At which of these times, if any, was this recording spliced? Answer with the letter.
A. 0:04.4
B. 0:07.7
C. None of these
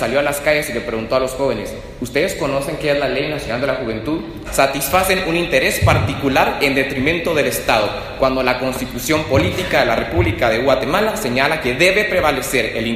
A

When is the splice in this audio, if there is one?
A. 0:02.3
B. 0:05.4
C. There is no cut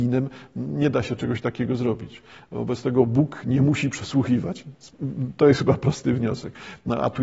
C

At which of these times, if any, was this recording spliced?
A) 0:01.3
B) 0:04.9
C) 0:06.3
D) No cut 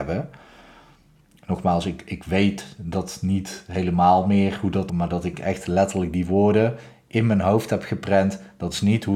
B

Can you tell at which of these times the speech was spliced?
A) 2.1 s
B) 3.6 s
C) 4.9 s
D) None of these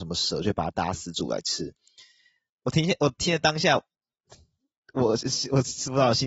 D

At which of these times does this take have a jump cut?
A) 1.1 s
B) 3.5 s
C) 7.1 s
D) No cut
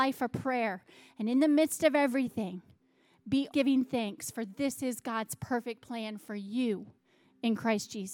B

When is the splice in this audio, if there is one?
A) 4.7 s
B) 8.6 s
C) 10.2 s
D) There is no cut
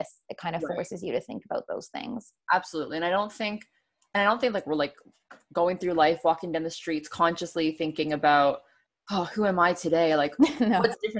D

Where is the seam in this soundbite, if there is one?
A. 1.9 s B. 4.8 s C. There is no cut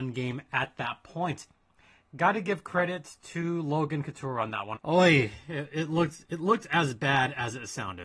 B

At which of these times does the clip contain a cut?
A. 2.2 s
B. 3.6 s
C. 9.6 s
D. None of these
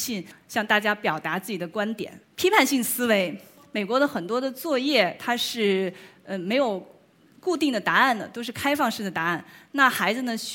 A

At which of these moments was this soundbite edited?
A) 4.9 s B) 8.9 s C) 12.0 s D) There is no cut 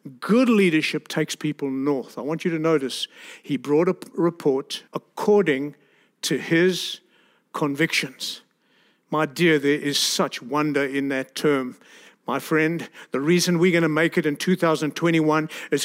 A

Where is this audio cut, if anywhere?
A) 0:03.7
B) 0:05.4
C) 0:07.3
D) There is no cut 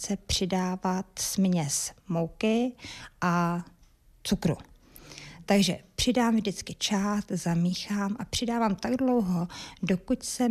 D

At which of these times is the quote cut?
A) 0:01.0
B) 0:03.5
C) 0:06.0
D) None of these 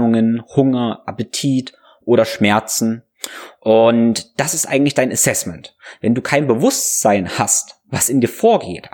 D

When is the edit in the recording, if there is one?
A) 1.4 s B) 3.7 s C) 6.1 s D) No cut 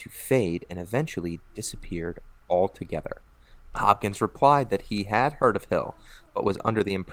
B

